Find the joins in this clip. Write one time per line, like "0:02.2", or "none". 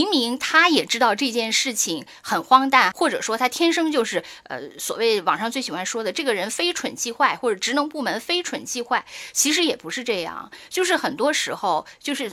0:02.9

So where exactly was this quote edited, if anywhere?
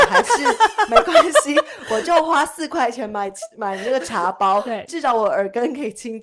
none

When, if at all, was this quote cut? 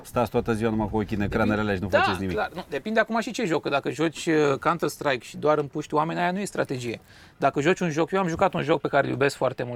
none

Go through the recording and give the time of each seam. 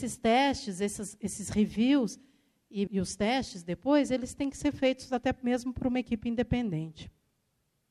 0:02.9

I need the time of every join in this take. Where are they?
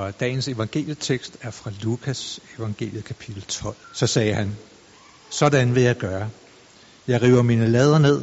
0:03.8

